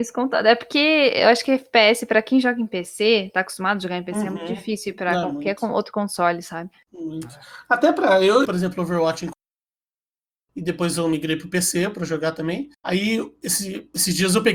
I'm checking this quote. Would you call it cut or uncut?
cut